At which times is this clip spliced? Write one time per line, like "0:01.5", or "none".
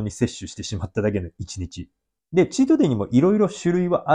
0:02.2